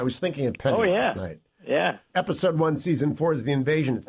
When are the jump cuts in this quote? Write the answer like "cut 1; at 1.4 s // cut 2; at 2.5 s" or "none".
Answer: cut 1; at 2.1 s